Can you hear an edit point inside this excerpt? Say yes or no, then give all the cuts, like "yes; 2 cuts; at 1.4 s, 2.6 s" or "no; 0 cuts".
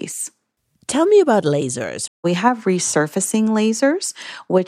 yes; 1 cut; at 2.1 s